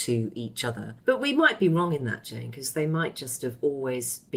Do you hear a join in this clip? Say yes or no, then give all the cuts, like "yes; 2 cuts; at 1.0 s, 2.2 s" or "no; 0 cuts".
yes; 1 cut; at 1.0 s